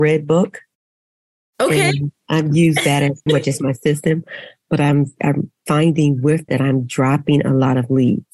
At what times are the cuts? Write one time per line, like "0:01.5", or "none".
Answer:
0:03.3
0:06.5